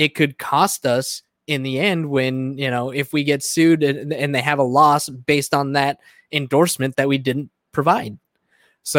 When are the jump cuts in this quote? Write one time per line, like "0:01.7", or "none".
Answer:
none